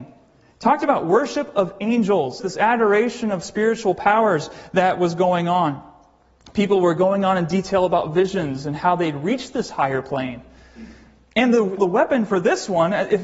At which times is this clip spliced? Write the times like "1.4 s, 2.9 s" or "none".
2.4 s, 11.8 s